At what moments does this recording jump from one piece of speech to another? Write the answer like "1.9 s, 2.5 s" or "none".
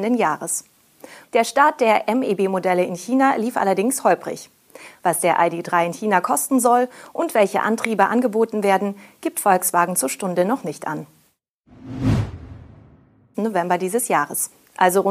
1.2 s, 13.3 s